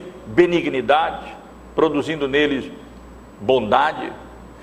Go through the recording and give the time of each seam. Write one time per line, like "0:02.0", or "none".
none